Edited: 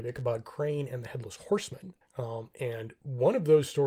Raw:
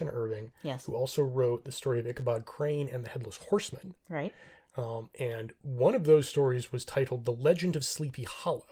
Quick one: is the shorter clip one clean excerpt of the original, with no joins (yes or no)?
no